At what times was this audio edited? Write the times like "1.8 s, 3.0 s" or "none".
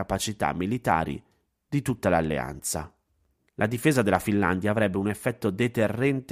3.5 s

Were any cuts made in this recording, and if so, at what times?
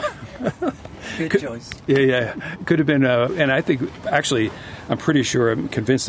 3.3 s

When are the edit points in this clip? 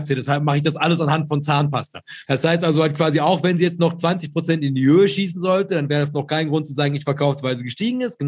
2.2 s

